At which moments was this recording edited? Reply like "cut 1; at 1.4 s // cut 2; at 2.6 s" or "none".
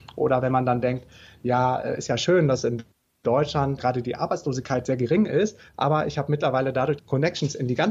cut 1; at 3.8 s // cut 2; at 7.0 s